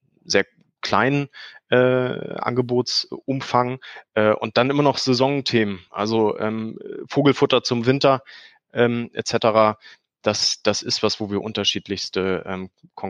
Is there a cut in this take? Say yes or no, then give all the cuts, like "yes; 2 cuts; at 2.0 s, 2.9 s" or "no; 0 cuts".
no; 0 cuts